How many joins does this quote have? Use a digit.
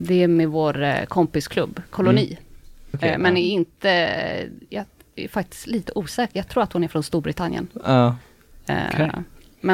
1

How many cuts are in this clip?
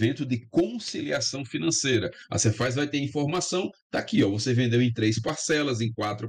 0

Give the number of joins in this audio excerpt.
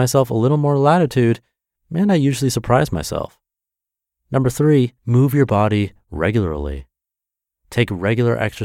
1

